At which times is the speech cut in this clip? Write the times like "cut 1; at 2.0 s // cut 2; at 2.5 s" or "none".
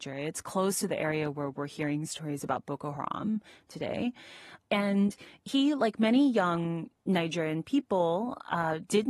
none